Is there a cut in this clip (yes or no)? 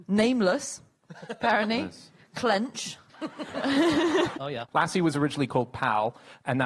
yes